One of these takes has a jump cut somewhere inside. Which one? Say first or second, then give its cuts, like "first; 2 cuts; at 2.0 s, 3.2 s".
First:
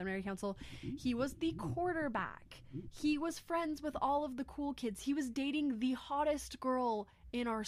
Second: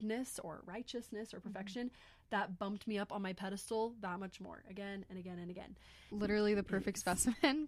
second; 1 cut; at 6.1 s